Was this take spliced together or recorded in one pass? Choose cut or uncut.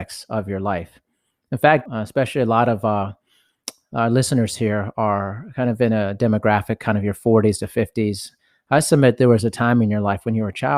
cut